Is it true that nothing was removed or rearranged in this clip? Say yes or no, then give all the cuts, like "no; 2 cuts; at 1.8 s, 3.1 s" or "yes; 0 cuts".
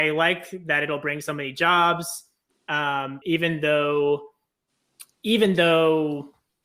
no; 2 cuts; at 3.2 s, 5.2 s